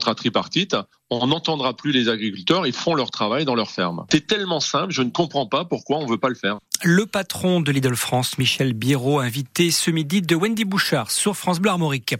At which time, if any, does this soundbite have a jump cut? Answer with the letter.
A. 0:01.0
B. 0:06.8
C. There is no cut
C